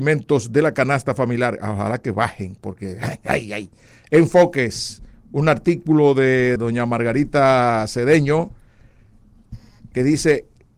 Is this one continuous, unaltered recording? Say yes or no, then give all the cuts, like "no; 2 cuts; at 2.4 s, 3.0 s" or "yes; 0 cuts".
no; 1 cut; at 6.6 s